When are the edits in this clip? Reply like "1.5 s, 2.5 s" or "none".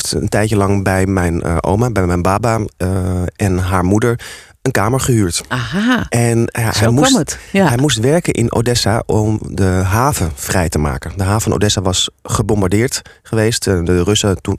none